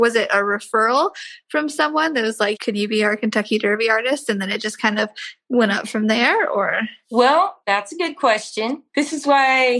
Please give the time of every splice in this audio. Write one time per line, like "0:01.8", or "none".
0:02.6